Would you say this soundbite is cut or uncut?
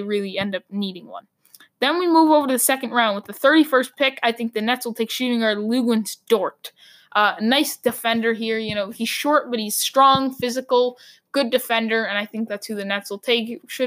uncut